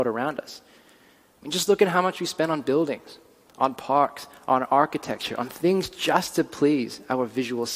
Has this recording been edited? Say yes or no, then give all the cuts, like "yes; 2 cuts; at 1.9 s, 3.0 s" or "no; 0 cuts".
no; 0 cuts